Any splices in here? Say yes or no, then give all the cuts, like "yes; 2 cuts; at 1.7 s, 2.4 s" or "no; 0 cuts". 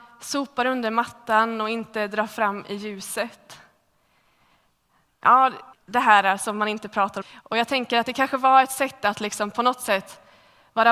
yes; 2 cuts; at 5.7 s, 7.2 s